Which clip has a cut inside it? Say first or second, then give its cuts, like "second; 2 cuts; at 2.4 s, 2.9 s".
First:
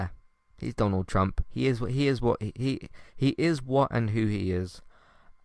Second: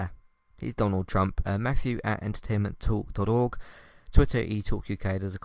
second; 1 cut; at 1.4 s